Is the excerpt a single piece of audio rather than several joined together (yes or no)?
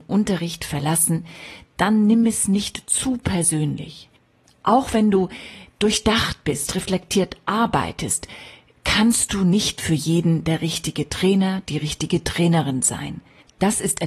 yes